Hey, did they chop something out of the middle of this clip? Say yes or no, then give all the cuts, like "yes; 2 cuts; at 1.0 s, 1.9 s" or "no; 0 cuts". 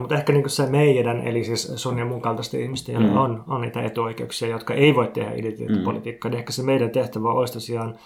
no; 0 cuts